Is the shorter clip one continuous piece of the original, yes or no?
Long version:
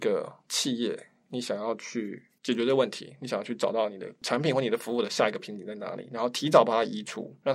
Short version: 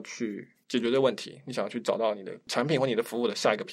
yes